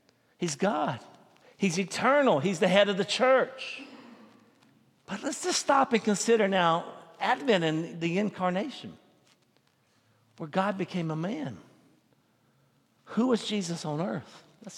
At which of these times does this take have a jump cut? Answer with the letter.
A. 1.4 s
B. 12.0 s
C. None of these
A